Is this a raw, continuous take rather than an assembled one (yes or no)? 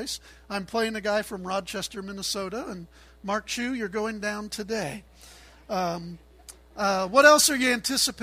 yes